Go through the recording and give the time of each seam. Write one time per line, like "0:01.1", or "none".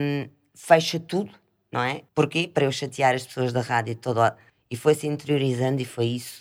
0:02.1
0:04.5